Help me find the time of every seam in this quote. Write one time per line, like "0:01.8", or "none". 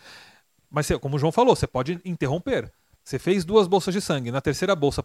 none

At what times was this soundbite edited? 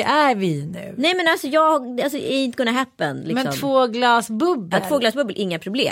none

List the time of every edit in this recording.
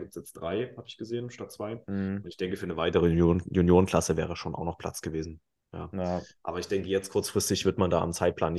none

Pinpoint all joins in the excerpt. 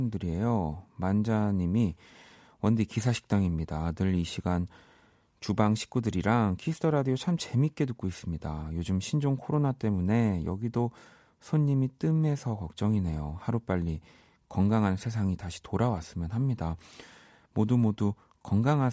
none

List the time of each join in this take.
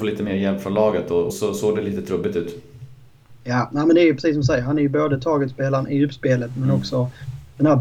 0:01.3

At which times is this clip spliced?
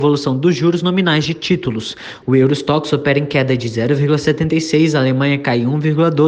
0:02.2

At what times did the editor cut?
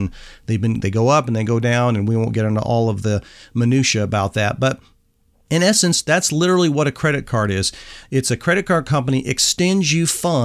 none

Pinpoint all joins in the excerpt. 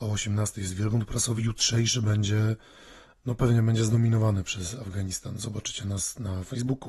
none

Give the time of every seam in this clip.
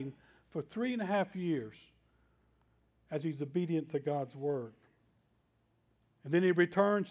none

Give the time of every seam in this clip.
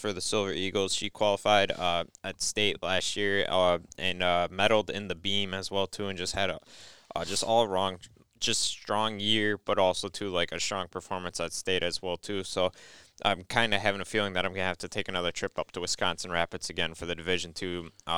none

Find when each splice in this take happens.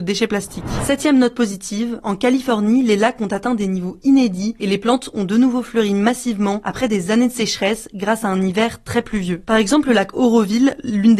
none

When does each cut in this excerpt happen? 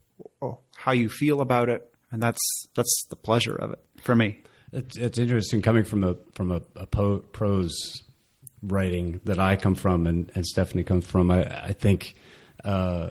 none

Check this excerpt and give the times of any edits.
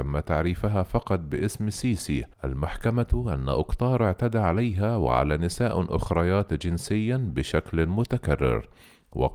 0:02.3

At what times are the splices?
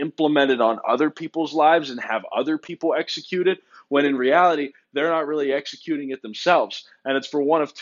none

